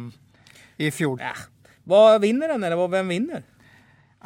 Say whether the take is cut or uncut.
cut